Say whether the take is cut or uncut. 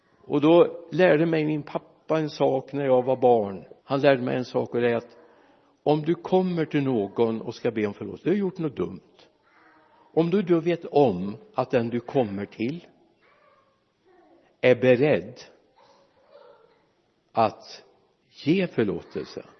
cut